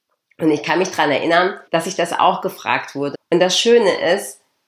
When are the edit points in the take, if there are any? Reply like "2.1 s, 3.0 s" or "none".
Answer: 1.7 s, 3.1 s